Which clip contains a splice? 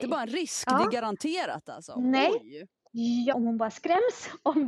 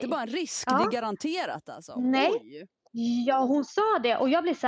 first; 1 cut; at 3.3 s

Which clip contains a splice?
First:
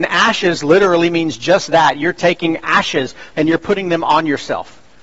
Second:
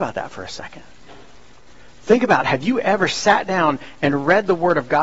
first; 1 cut; at 3.3 s

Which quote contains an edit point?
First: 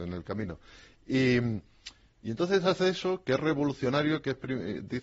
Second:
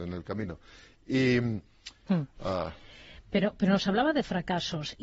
second; 1 cut; at 2.1 s

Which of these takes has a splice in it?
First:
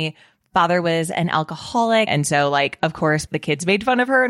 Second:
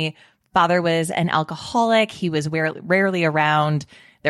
first; 2 cuts; at 2.1 s, 3.3 s

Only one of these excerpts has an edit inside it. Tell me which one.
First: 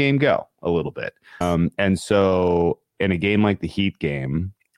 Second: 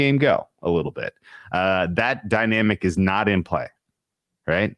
first; 1 cut; at 1.4 s

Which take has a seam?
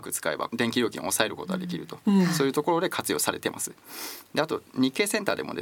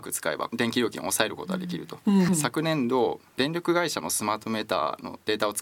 second; 1 cut; at 2.3 s

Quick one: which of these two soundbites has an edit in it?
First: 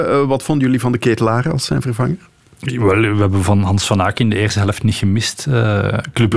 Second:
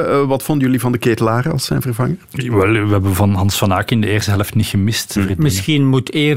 second; 2 cuts; at 2.2 s, 5.2 s

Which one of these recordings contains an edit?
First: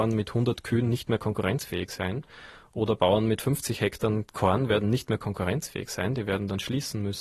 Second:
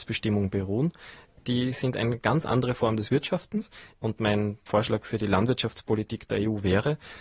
second; 1 cut; at 3.9 s

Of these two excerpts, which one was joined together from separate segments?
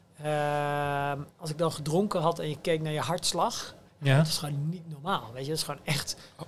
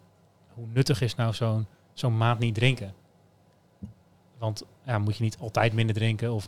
first; 1 cut; at 1.3 s

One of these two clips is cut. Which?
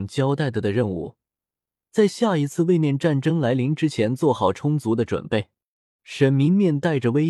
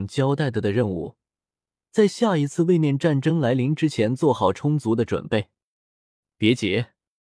first; 1 cut; at 6.0 s

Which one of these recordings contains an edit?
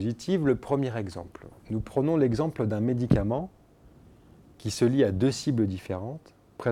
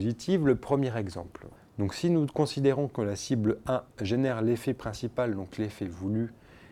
second; 1 cut; at 1.6 s

